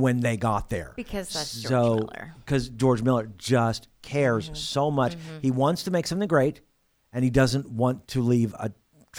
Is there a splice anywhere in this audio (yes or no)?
no